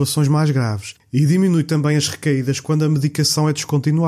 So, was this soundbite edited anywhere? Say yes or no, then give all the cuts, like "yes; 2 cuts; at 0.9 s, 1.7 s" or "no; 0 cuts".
no; 0 cuts